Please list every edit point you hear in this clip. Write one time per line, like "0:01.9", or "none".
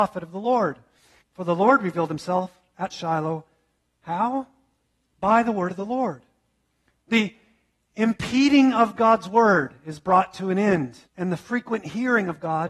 0:01.2
0:06.9
0:11.1